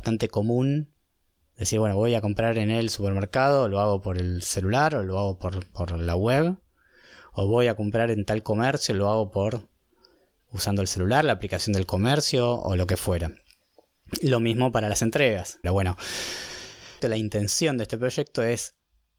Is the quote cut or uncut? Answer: cut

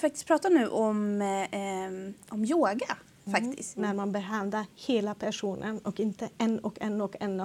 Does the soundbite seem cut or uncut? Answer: cut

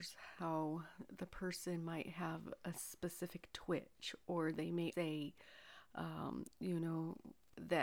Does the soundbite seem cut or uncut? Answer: cut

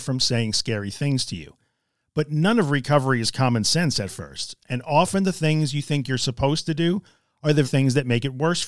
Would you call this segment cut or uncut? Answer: cut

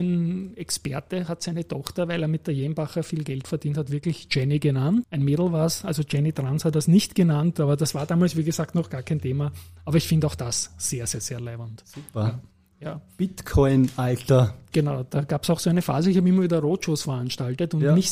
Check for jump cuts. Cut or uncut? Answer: cut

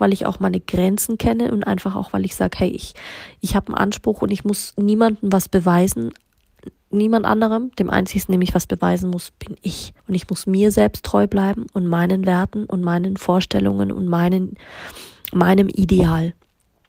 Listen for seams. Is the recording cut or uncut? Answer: cut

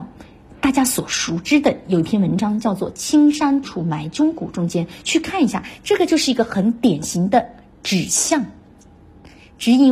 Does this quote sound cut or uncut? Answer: cut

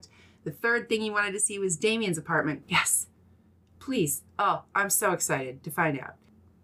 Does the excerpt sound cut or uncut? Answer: cut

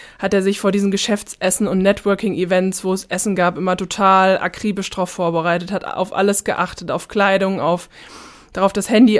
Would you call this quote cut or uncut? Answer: uncut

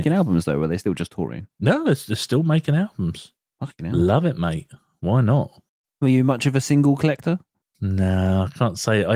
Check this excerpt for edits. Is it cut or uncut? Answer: uncut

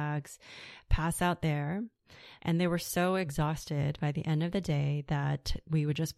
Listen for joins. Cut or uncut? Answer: cut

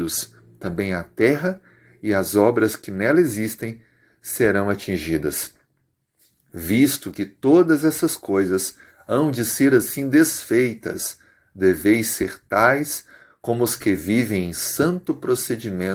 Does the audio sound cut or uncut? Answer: uncut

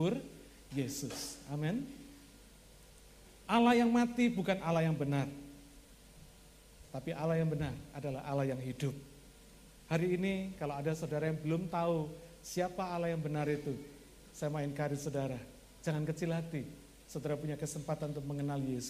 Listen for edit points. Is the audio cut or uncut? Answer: uncut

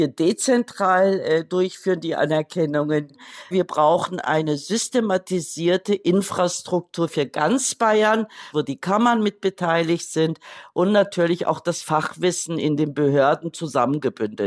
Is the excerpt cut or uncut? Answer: cut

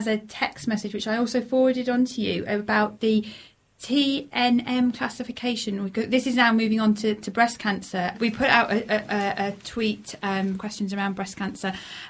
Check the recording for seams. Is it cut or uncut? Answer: cut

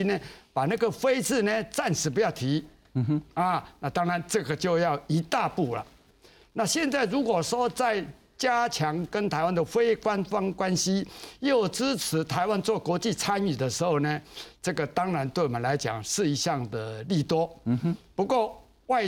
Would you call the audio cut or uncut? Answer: uncut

